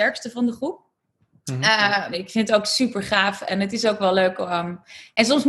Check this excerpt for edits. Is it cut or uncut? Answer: cut